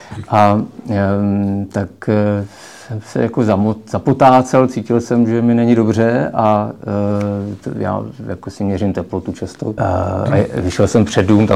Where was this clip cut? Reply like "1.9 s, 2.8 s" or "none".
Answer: 9.8 s